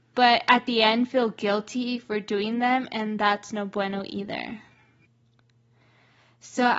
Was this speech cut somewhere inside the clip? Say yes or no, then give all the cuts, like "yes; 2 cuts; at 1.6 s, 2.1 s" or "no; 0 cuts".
no; 0 cuts